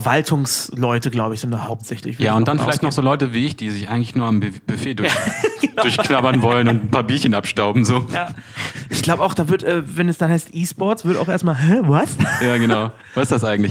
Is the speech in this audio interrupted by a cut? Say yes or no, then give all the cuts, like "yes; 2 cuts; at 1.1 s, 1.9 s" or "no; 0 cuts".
no; 0 cuts